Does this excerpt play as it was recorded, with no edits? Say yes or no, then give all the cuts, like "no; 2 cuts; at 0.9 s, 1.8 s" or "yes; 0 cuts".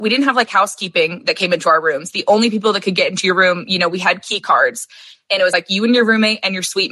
yes; 0 cuts